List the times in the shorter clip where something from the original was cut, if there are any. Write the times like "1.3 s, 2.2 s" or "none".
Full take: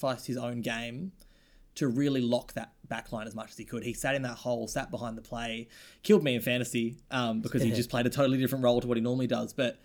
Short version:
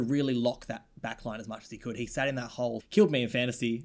2.8 s